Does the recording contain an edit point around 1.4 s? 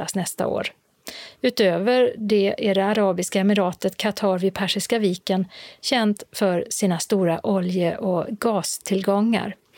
no; 0 cuts

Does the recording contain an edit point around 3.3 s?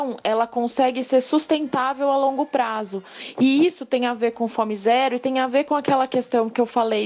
no; 0 cuts

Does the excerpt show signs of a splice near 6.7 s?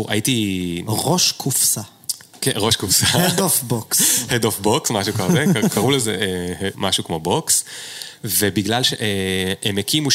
yes; 1 cut; at 6.7 s

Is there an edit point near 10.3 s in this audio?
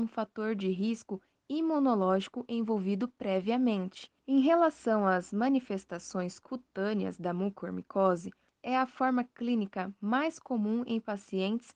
no; 2 cuts; at 4.2 s, 8.5 s

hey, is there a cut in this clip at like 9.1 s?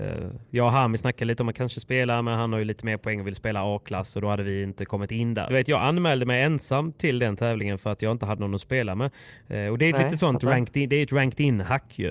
no; 1 cut; at 5.5 s

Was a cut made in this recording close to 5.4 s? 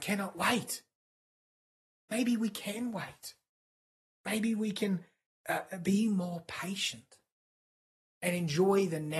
no; 1 cut; at 4.1 s

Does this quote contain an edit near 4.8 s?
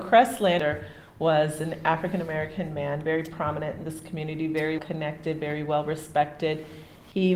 yes; 1 cut; at 4.8 s

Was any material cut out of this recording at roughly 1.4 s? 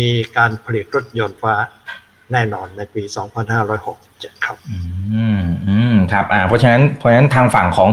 yes; 2 cuts; at 1.4 s, 4.6 s

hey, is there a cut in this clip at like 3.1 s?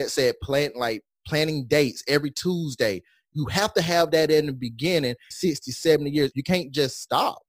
no; 2 cuts; at 5.3 s, 6.3 s

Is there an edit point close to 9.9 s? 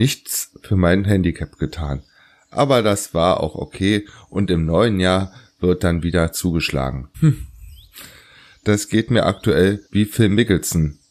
yes; 2 cuts; at 7.1 s, 9.9 s

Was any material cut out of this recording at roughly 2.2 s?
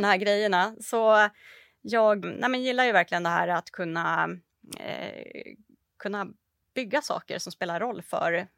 yes; 1 cut; at 2.2 s

